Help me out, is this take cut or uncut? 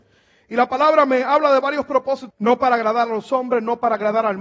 cut